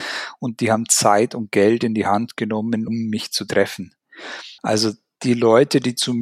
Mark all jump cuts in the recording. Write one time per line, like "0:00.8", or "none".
0:02.9
0:04.6